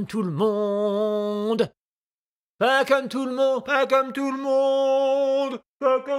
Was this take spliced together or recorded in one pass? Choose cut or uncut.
uncut